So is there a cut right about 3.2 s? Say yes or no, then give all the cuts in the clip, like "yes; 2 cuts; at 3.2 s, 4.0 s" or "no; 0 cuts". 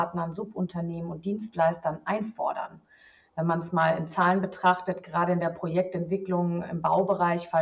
no; 0 cuts